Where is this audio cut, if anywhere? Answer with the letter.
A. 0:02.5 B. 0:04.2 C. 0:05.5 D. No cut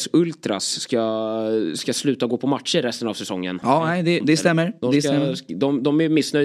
B